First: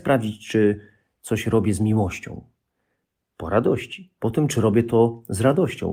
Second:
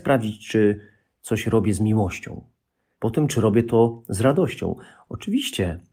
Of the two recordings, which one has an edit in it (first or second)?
second